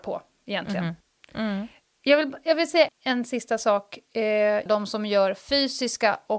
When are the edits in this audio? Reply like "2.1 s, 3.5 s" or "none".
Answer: 2.9 s, 4.7 s